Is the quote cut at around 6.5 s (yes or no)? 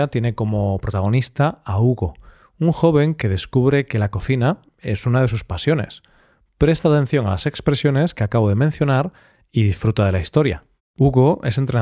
no